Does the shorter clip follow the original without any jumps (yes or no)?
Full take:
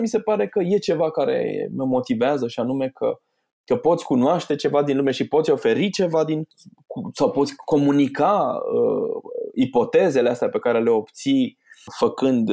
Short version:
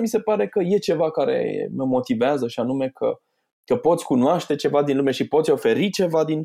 yes